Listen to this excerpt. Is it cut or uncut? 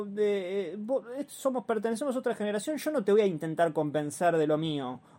uncut